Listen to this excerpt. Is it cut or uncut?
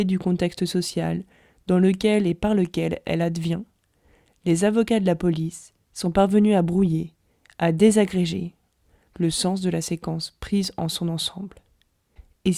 uncut